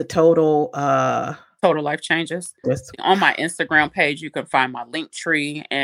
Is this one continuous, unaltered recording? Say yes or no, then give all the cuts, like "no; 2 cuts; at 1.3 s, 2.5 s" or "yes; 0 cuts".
no; 1 cut; at 2.6 s